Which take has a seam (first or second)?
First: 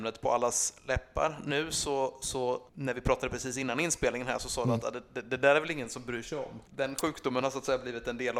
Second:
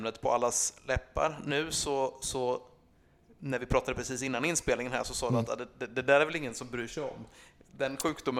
first